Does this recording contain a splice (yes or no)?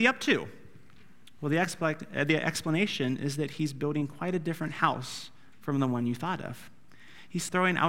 no